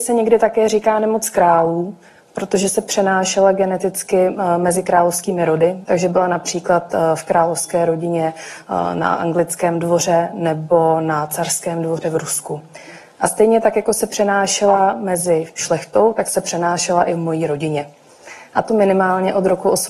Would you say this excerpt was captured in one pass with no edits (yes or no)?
no